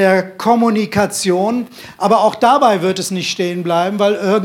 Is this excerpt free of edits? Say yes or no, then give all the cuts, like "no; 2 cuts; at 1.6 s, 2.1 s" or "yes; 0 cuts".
yes; 0 cuts